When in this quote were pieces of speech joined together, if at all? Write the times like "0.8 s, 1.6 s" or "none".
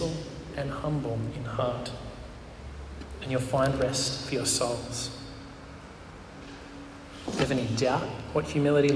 none